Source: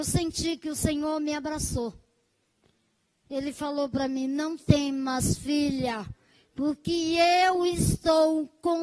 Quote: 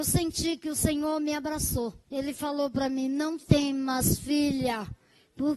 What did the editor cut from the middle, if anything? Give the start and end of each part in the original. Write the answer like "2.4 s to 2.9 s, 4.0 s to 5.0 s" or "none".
2.0 s to 3.2 s